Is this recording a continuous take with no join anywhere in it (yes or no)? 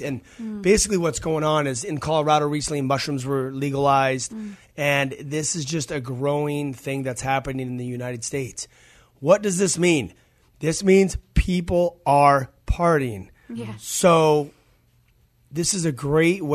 yes